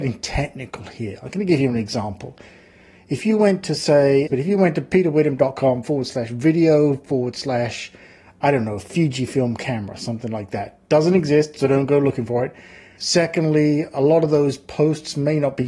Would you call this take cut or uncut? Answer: cut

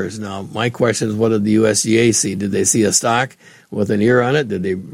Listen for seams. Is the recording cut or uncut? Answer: uncut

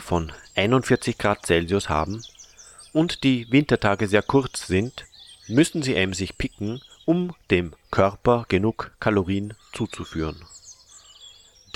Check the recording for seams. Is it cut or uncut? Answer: uncut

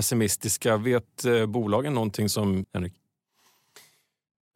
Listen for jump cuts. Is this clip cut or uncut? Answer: cut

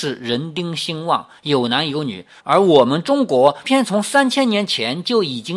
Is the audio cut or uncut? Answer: cut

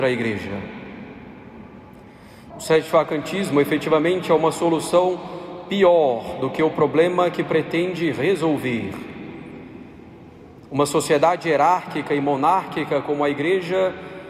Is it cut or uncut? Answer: cut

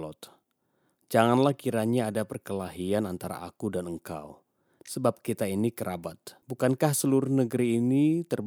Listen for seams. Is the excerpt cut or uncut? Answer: cut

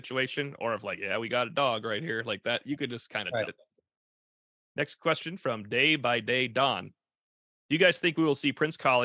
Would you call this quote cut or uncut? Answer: cut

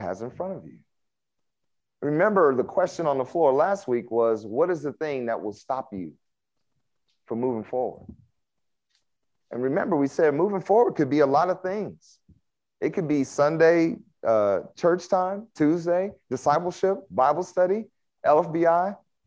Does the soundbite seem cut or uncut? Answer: uncut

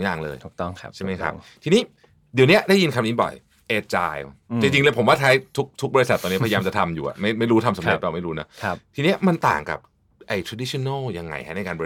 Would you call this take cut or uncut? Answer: uncut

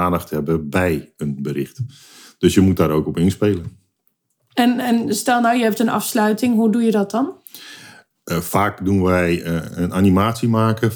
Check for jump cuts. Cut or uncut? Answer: uncut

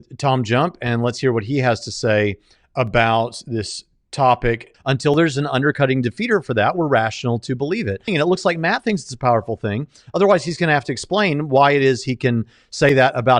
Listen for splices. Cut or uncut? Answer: cut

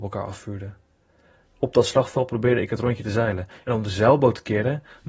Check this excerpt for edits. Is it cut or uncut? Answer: cut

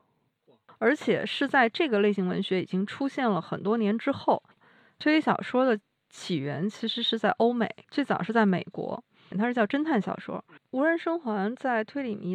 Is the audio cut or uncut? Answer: cut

